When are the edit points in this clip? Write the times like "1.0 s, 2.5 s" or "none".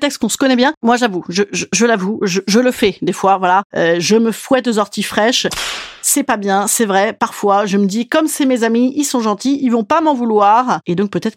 none